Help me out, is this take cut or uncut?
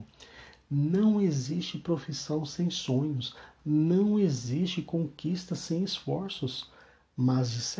uncut